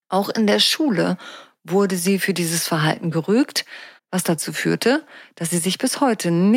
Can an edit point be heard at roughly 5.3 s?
no; 1 cut; at 4.0 s

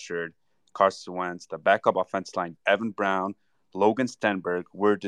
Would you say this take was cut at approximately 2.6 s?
yes; 1 cut; at 2.6 s

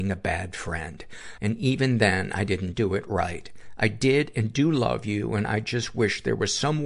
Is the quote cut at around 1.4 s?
yes; 1 cut; at 1.4 s

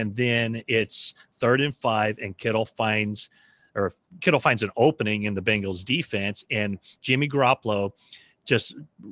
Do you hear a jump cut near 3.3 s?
no; 0 cuts

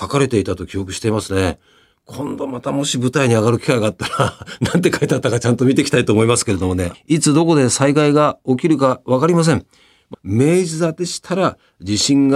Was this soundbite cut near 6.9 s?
yes; 2 cuts; at 6.9 s, 10.1 s

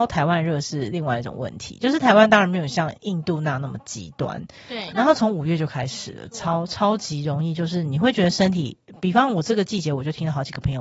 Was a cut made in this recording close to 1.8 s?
no; 1 cut; at 4.9 s

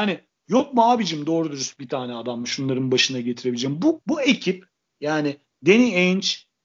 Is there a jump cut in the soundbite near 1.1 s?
no; 1 cut; at 4.0 s

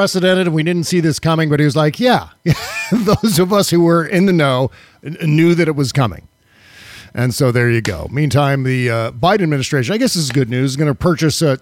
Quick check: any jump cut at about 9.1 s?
no; 0 cuts

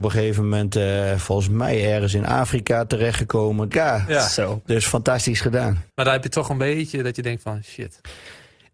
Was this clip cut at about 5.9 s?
yes; 2 cuts; at 3.7 s, 5.9 s

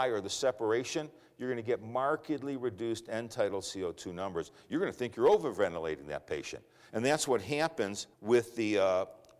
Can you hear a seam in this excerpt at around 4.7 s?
no; 2 cuts; at 6.9 s, 8.1 s

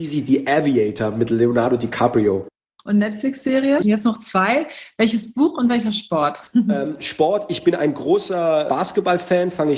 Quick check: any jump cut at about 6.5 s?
no; 1 cut; at 3.8 s

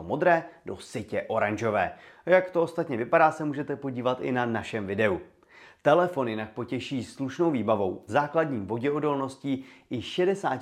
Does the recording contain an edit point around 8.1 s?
yes; 1 cut; at 8.1 s

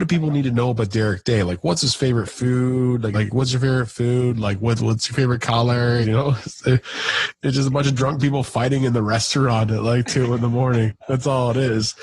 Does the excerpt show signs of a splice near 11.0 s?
no; 2 cuts; at 3.1 s, 6.0 s

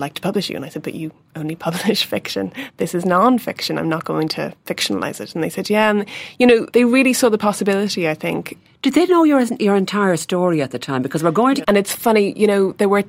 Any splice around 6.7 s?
yes; 2 cuts; at 6.7 s, 11.6 s

